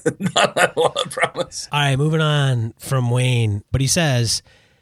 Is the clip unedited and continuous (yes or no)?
no